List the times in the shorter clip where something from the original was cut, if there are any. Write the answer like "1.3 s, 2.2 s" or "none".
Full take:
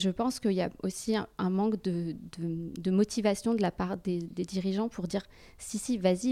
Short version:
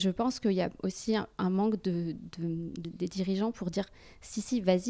2.8 s